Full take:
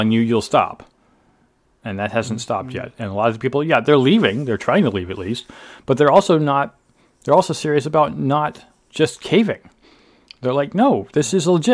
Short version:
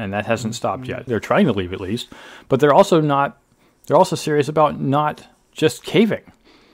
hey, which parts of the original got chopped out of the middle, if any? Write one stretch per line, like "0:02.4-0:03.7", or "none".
0:02.9-0:04.4